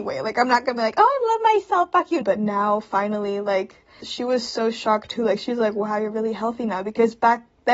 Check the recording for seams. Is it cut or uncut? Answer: cut